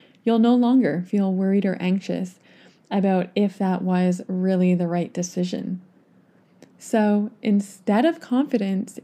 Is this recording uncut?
yes; 0 cuts

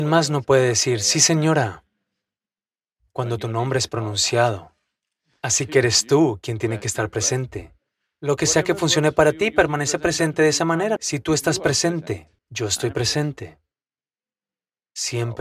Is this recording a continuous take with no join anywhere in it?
no; 2 cuts; at 11.0 s, 12.4 s

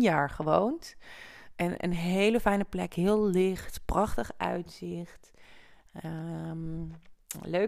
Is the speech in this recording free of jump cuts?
yes; 0 cuts

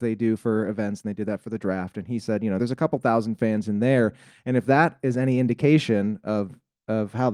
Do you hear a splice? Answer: no; 0 cuts

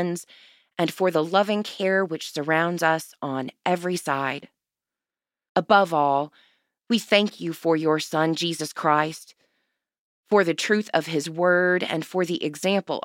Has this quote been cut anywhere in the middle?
yes; 1 cut; at 5.5 s

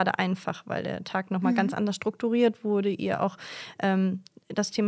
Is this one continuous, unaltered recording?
yes; 0 cuts

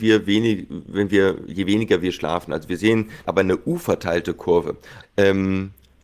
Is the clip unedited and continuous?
no; 2 cuts; at 3.2 s, 5.0 s

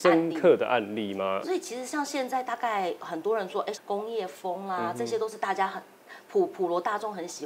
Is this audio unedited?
no; 2 cuts; at 1.4 s, 3.7 s

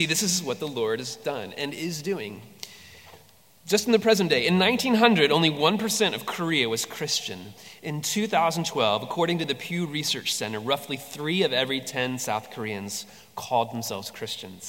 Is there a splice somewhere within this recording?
no; 0 cuts

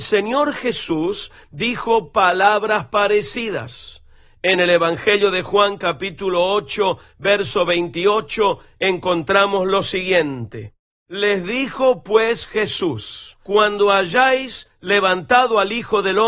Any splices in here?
no; 0 cuts

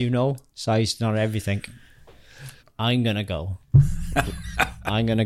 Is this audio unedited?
no; 1 cut; at 2.6 s

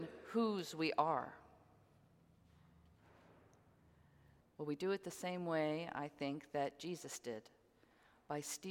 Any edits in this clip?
yes; 1 cut; at 4.4 s

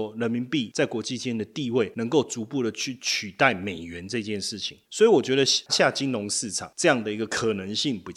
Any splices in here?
yes; 1 cut; at 5.7 s

